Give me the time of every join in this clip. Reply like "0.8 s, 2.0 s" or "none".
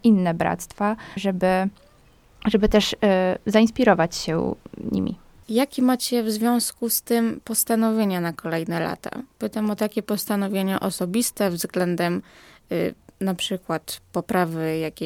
1.2 s